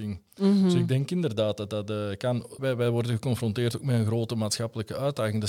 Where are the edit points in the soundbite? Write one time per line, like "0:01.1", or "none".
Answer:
0:02.6